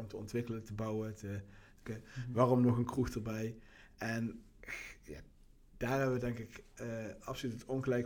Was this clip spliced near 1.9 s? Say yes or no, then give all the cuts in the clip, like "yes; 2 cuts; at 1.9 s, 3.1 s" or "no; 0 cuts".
yes; 1 cut; at 1.9 s